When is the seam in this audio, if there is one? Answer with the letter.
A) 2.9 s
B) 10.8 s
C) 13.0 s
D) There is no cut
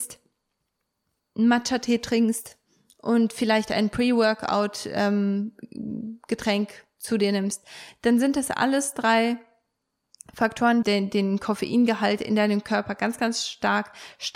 B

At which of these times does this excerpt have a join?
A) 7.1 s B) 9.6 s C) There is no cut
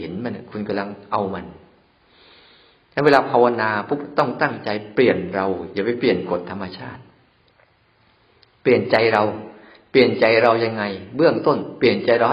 C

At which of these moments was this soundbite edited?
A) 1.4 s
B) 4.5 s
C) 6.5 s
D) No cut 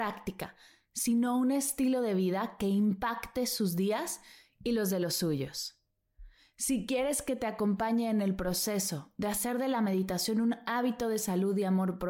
D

